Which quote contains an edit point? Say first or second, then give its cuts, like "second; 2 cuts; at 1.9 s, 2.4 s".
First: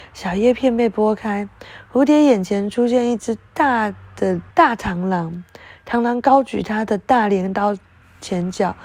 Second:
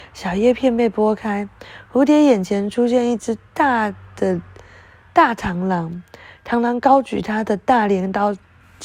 first; 1 cut; at 4.5 s